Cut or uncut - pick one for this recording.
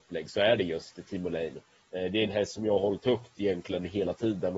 uncut